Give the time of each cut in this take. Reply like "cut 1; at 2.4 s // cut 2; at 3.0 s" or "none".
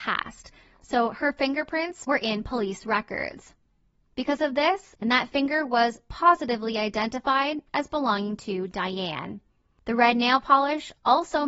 cut 1; at 4.9 s